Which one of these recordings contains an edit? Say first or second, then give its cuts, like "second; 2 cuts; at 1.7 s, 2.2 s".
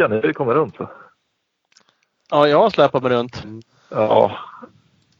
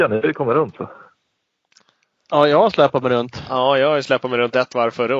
first; 1 cut; at 3.4 s